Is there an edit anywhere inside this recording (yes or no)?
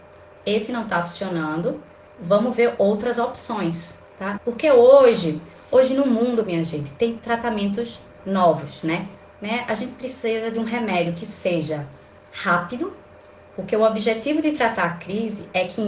yes